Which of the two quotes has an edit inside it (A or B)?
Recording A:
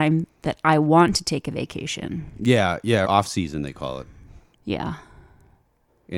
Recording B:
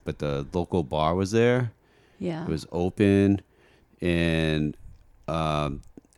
A